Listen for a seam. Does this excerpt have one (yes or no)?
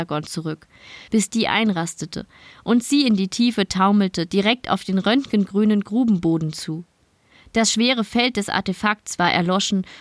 yes